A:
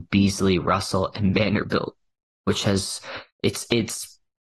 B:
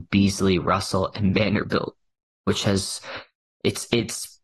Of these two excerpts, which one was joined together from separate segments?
A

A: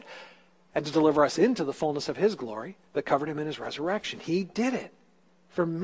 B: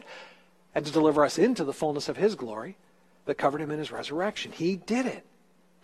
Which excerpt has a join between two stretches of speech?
A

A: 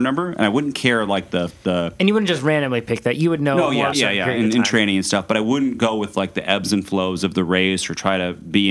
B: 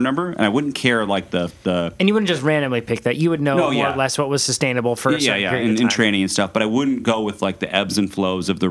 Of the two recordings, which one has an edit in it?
A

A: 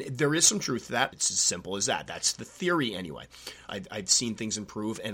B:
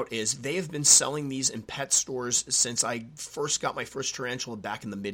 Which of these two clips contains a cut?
A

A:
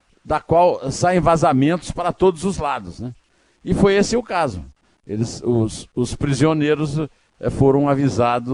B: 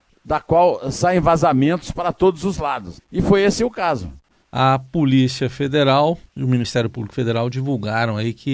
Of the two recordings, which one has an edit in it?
B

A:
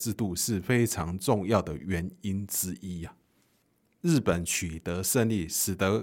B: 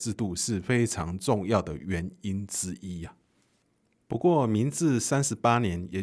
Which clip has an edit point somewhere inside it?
A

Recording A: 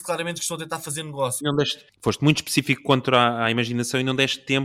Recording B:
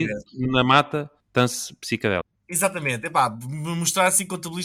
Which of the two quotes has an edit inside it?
A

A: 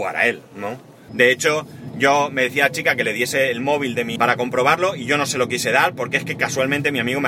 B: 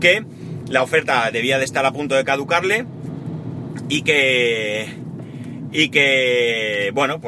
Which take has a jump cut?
A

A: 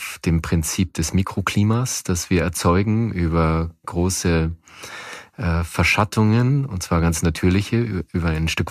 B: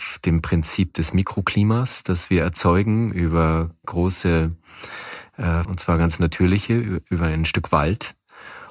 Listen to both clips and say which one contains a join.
B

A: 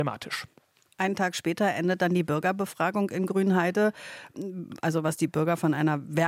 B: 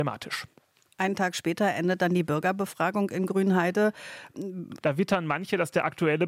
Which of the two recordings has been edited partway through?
B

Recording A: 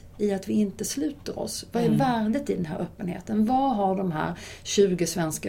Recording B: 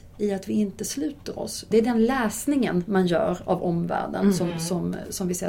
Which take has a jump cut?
B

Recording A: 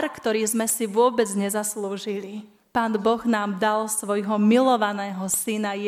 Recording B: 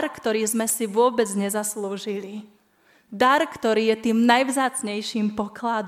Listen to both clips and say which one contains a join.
A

